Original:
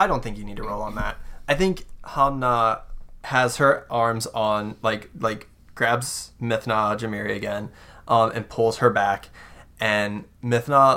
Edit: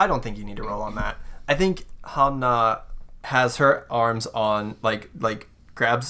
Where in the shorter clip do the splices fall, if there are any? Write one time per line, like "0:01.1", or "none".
none

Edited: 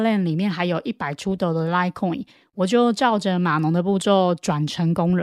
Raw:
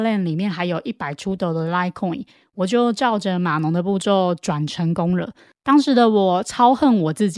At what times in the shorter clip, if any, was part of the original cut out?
none

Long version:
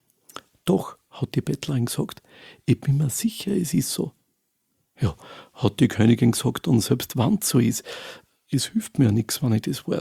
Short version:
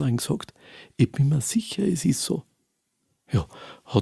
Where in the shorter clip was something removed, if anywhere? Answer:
none

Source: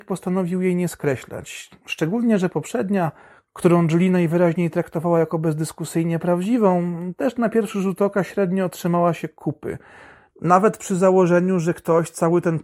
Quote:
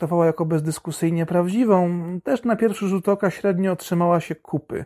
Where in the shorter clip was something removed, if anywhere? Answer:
none

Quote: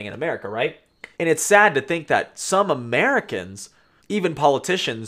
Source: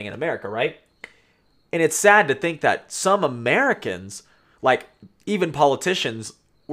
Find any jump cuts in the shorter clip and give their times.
0:01.1
0:04.0

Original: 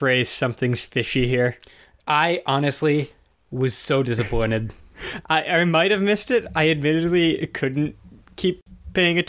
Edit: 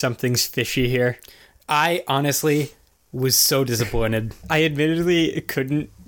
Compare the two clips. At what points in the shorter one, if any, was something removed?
0:04.4

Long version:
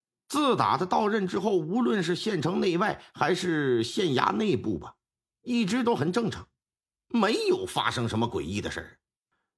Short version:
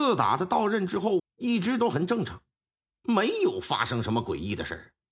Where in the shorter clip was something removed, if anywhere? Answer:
0:01.2

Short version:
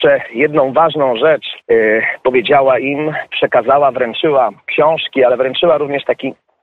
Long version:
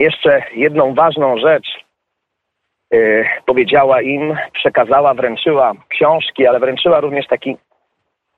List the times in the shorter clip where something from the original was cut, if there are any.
0:01.6

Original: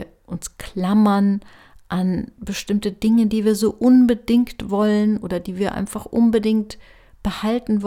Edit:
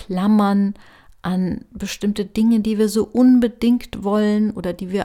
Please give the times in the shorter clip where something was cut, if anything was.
none

